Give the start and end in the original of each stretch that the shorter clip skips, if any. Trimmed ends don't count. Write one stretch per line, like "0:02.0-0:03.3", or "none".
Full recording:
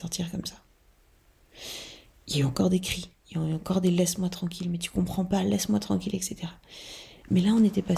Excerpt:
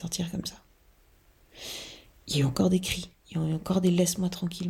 none